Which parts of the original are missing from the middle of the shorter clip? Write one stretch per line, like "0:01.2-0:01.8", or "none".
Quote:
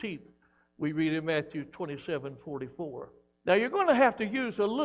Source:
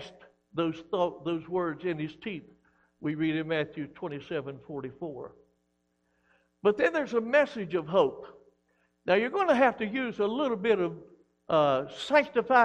0:05.6-0:09.0

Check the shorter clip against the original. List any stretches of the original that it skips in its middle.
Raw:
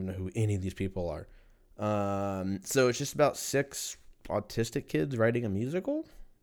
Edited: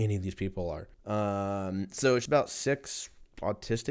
0:01.3-0:01.7
0:03.0-0:03.1

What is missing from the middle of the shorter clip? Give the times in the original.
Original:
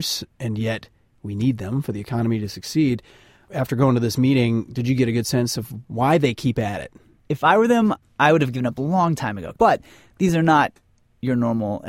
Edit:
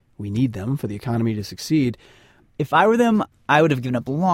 0:03.4-0:07.1

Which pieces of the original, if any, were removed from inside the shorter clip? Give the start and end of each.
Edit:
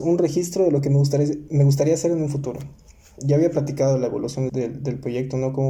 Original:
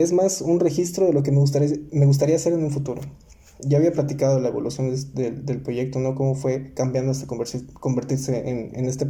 0:04.9-0:05.1

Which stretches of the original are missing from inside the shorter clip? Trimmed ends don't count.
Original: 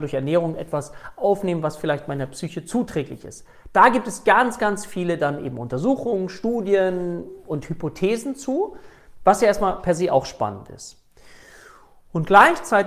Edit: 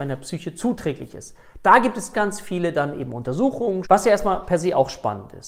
0:04.2-0:04.6
0:06.3-0:09.2

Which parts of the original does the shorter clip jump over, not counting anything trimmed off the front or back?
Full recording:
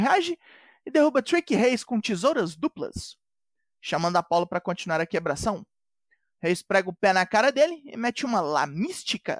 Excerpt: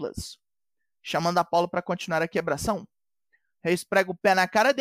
none

